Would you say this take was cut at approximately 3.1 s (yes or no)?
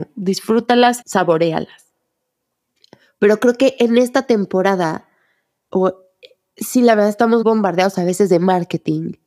no